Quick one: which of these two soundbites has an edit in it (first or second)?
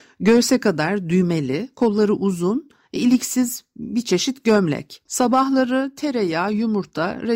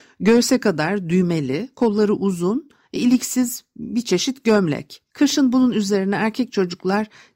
first